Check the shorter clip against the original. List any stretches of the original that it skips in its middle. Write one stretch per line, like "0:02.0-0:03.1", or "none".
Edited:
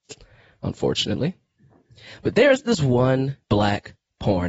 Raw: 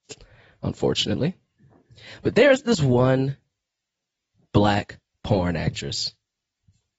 0:03.4-0:04.5

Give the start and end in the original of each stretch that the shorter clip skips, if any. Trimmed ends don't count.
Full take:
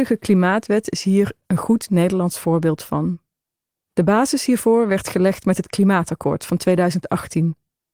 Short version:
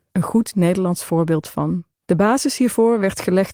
0:03.3-0:03.8

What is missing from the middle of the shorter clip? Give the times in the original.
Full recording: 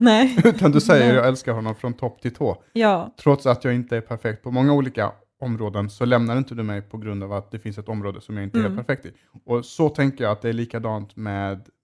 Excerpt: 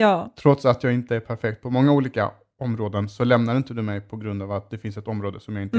none

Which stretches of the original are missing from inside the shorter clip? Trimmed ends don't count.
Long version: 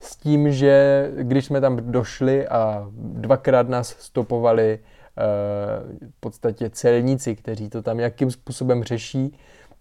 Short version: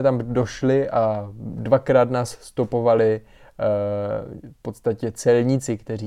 none

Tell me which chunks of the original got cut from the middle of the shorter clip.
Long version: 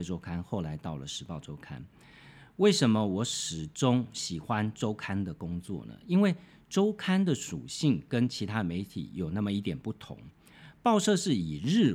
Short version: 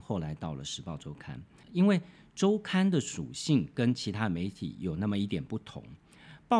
0:02.1-0:06.0

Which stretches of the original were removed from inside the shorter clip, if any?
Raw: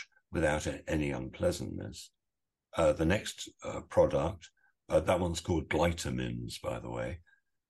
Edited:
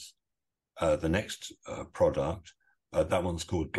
none

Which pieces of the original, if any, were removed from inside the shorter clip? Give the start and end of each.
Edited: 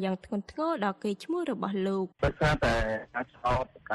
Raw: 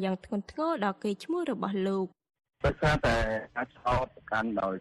0:02.1-0:02.6

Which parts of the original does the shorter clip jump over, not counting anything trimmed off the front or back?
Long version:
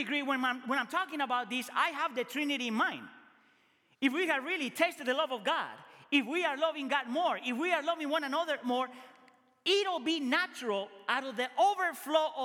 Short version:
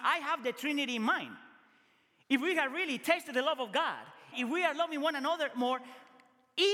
0:06.0-0:07.4

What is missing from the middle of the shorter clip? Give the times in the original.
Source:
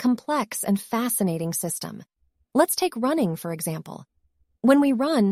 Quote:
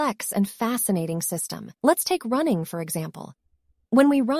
0:02.1-0:02.5

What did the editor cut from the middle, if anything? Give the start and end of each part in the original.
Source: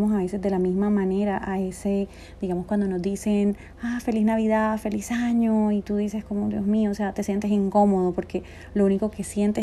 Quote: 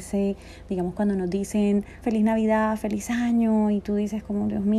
0:03.7-0:04.0

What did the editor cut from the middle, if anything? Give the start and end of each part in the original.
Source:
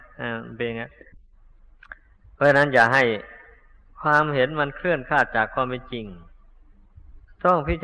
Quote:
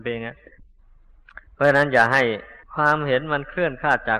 0:02.0-0:02.3
0:03.4-0:03.9

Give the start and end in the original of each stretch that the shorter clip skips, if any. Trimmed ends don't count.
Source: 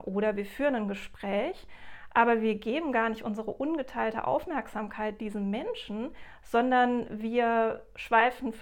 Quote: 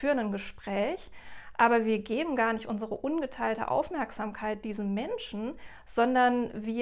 none

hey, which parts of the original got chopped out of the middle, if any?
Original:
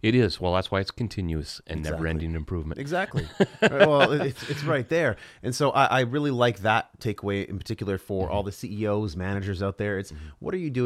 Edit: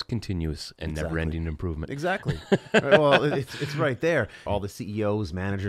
0:05.3-0:08.3

